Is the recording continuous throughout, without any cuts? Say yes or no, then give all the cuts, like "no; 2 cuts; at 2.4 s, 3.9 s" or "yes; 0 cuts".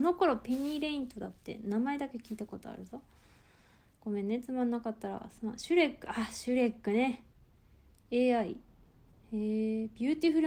yes; 0 cuts